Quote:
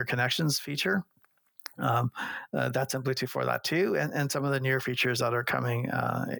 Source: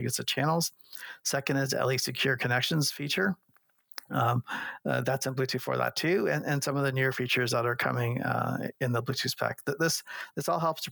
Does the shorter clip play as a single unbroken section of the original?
yes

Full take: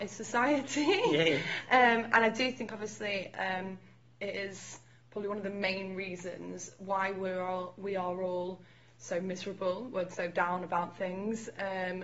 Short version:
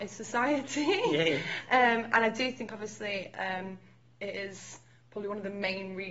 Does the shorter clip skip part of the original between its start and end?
no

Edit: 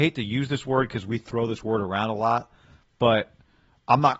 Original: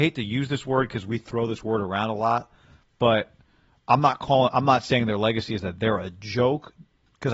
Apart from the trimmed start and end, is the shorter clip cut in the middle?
no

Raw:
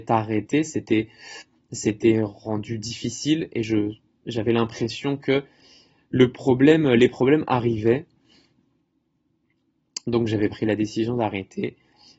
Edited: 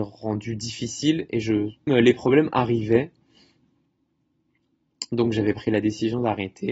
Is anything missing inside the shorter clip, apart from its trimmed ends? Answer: yes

